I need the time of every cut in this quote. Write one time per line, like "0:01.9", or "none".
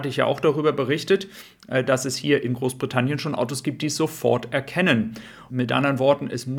0:05.5